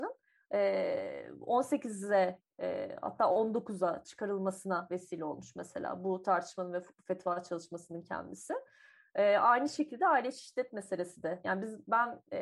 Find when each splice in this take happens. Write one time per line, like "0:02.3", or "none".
none